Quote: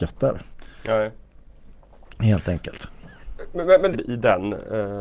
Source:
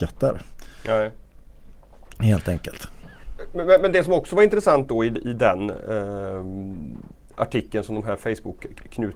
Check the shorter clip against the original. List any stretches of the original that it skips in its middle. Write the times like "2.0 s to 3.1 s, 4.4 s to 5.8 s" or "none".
3.9 s to 5.1 s